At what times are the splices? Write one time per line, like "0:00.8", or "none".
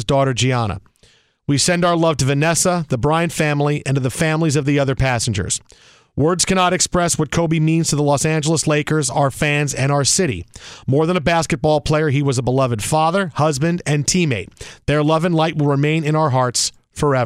none